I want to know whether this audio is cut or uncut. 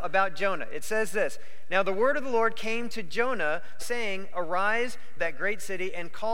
cut